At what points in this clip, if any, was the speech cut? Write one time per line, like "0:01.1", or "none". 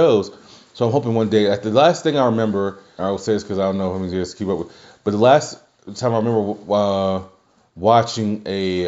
0:03.0